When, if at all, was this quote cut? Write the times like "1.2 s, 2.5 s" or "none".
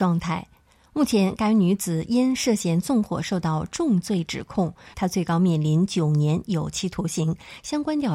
4.9 s

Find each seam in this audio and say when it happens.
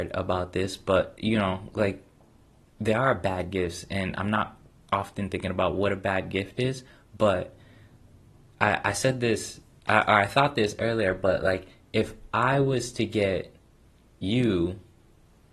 none

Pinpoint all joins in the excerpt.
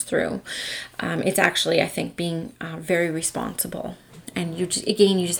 none

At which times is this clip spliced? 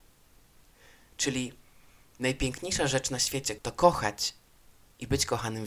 3.6 s

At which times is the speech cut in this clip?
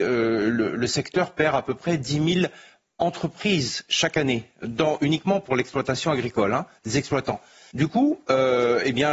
7.7 s

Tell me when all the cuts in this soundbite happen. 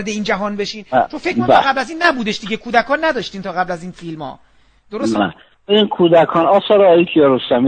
5.2 s

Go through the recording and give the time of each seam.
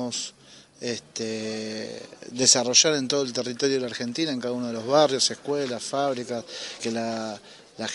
6.8 s

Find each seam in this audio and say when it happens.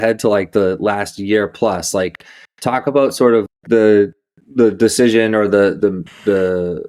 3.5 s, 5.8 s

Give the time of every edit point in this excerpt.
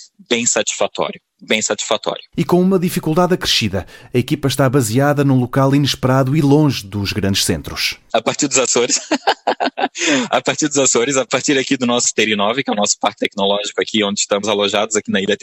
none

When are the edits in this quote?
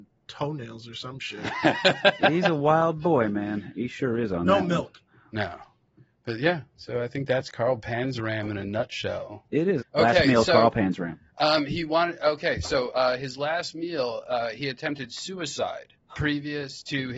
5.1 s, 9.8 s

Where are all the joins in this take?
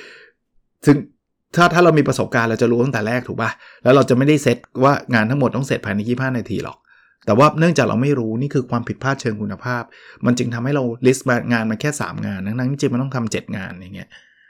none

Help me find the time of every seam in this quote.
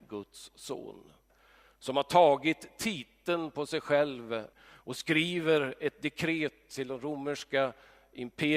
4.5 s

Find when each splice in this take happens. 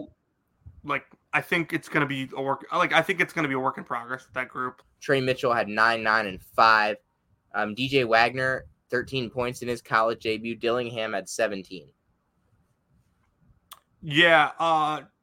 4.8 s

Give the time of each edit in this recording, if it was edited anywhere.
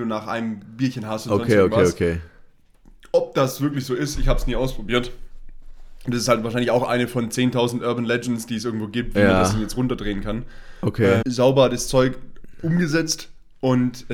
11.2 s

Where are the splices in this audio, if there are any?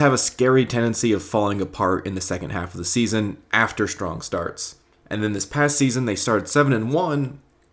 5.0 s

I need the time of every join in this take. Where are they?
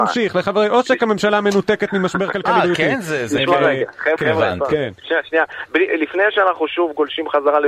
4.2 s

